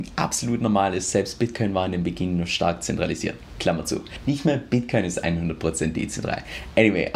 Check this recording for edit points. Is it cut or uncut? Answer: cut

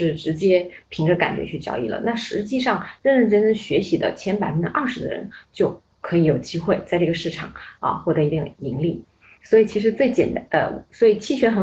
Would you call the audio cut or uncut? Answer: uncut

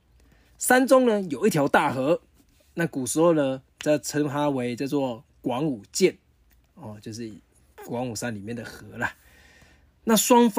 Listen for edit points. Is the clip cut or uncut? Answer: uncut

